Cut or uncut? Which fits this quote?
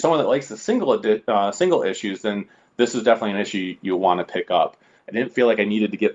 cut